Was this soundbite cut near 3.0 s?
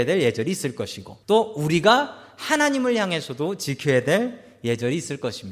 no; 1 cut; at 1.2 s

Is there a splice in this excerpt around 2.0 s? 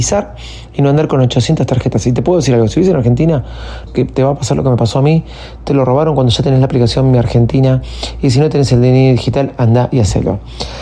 no; 1 cut; at 3.9 s

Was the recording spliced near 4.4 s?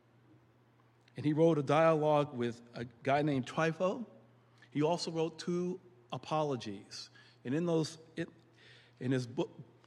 no; 0 cuts

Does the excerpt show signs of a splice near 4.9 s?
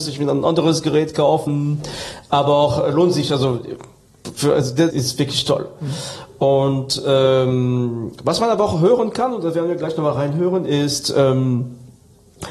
yes; 1 cut; at 4.9 s

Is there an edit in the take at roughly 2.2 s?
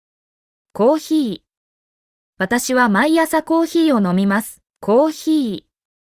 no; 1 cut; at 4.7 s

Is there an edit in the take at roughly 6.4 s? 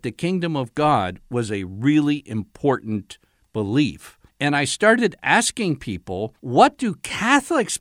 yes; 2 cuts; at 4.3 s, 6.4 s

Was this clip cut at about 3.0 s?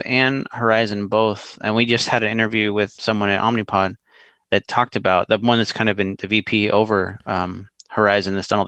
yes; 1 cut; at 3.0 s

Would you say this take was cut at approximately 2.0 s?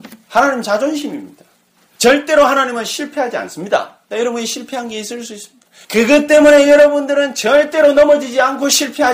yes; 3 cuts; at 2.0 s, 4.1 s, 5.8 s

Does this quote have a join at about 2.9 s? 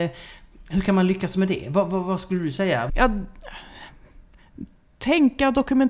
yes; 1 cut; at 2.9 s

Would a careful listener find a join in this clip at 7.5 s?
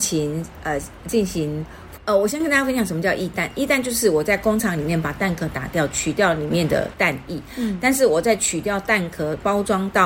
no; 1 cut; at 2.0 s

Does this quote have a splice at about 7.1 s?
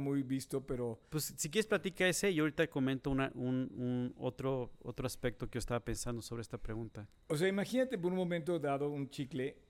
no; 0 cuts

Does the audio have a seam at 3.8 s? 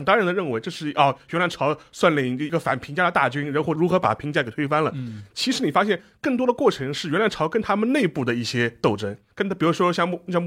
yes; 1 cut; at 3.8 s

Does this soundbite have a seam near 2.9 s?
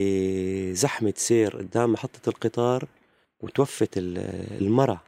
no; 0 cuts

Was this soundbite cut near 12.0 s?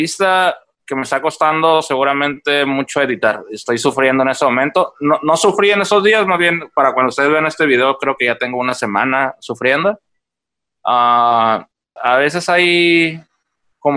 yes; 1 cut; at 12.0 s

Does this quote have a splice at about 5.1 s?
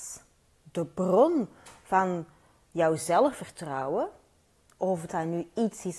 yes; 1 cut; at 5.1 s

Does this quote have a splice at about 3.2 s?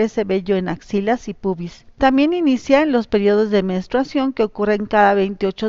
no; 1 cut; at 2.0 s

